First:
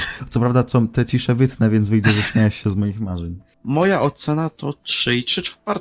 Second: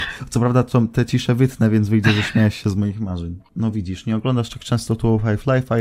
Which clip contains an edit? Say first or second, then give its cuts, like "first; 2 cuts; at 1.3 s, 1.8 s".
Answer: second; 1 cut; at 3.4 s